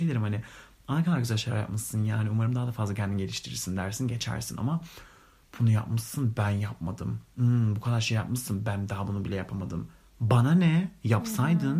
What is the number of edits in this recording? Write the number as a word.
zero